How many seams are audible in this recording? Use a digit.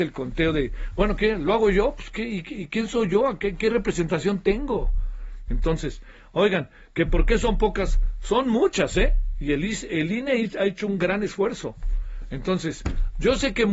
1